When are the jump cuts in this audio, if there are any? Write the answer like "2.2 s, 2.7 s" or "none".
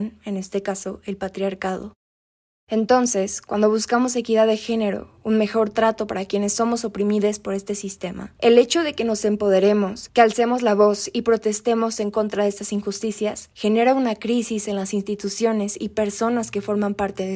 none